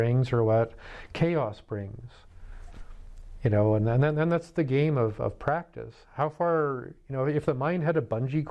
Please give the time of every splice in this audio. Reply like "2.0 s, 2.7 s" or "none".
none